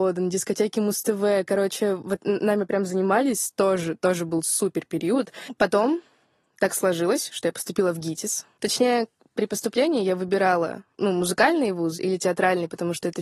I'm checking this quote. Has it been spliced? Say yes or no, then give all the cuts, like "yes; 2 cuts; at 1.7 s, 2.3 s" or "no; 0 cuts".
yes; 1 cut; at 8.6 s